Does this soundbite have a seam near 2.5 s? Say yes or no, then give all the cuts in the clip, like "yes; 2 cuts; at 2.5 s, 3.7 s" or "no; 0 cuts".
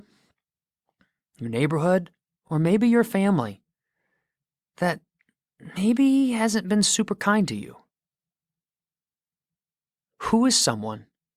no; 0 cuts